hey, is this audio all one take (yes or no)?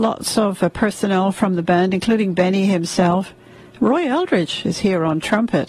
yes